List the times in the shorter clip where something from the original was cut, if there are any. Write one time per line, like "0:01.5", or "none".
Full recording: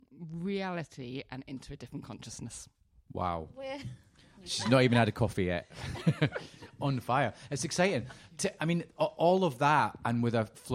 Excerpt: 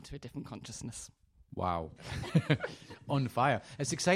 0:02.0